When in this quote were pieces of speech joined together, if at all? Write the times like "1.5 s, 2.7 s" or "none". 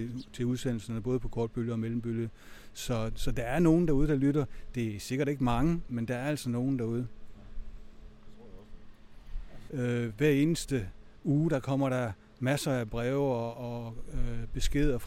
5.9 s, 9.7 s